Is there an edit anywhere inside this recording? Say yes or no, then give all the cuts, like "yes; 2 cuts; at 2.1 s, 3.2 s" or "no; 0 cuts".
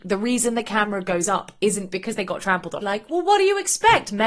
yes; 1 cut; at 2.8 s